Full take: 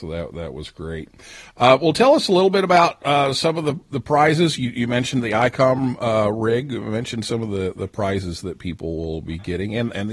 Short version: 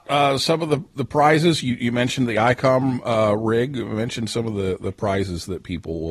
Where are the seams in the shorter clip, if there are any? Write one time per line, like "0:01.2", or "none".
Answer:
none